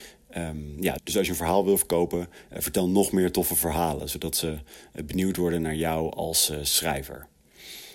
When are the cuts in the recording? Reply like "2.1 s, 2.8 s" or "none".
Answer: 1.0 s